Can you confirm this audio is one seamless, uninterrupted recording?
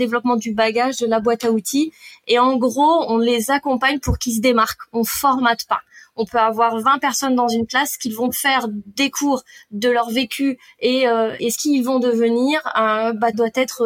no; 1 cut; at 11.4 s

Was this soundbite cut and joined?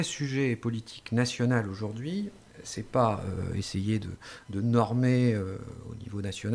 no; 0 cuts

